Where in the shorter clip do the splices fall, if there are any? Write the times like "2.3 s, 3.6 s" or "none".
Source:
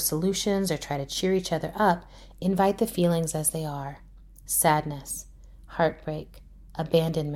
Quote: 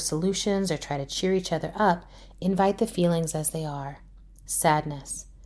none